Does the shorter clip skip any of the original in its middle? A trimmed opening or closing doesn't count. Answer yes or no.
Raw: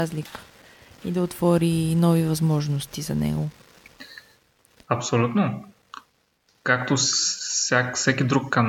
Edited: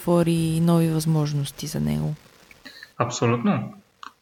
yes